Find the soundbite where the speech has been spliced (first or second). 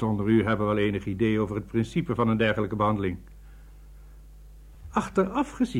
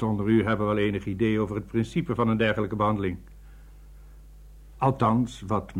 second